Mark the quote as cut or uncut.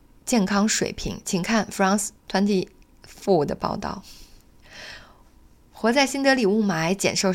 cut